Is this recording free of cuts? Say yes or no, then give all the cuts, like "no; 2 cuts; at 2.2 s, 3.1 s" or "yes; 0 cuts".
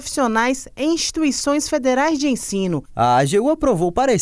no; 1 cut; at 2.9 s